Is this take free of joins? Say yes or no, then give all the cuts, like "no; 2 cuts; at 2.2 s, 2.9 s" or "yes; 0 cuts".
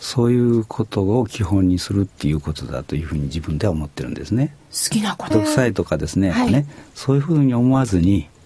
no; 2 cuts; at 5.3 s, 6.5 s